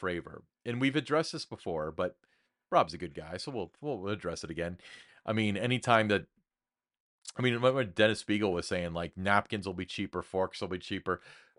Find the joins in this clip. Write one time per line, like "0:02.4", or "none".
0:05.1